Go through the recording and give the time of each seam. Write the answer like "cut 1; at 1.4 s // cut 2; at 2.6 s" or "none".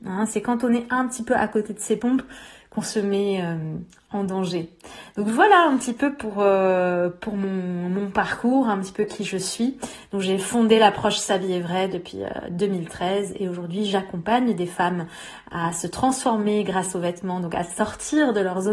none